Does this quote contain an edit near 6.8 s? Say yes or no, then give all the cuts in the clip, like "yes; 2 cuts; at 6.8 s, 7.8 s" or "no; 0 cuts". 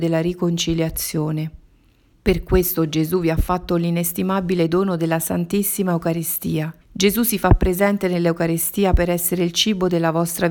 yes; 2 cuts; at 2.1 s, 6.8 s